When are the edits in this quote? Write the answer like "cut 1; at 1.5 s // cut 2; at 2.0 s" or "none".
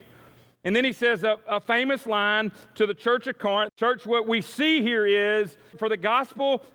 cut 1; at 3.7 s // cut 2; at 5.7 s